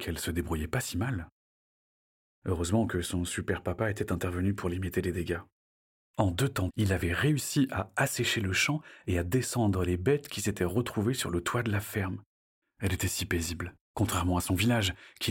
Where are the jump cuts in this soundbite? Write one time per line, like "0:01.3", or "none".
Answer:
0:06.7
0:12.6
0:13.8